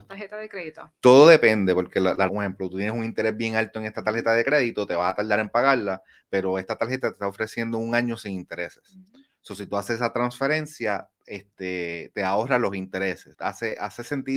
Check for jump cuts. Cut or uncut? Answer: cut